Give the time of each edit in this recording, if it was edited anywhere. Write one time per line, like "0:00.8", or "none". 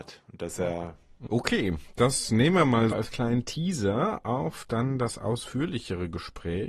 0:01.3
0:02.9